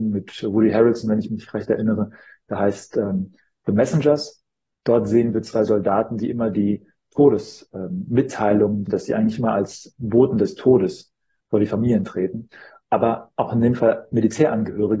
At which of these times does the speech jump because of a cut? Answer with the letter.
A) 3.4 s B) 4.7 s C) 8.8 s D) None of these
C